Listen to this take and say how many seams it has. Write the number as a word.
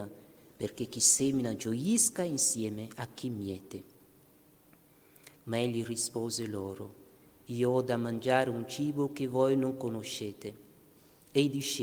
one